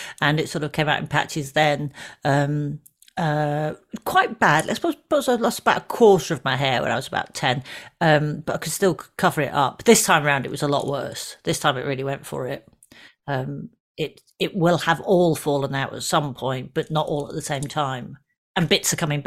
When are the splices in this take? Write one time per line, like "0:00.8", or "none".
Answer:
none

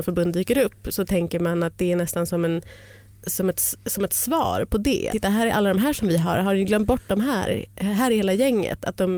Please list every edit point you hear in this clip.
0:05.1

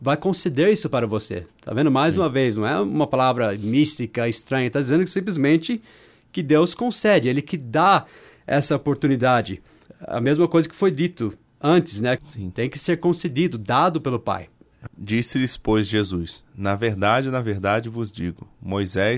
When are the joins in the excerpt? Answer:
0:12.2
0:14.9

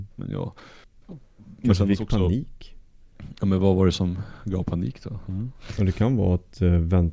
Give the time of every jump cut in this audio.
none

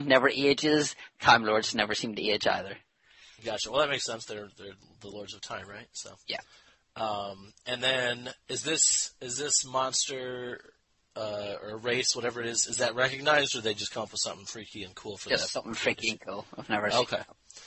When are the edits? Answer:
none

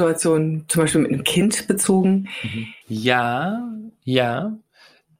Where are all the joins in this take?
0:02.8

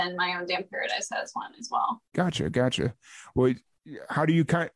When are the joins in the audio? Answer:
0:02.1

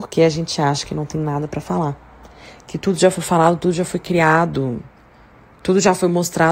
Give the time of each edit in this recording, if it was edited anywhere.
none

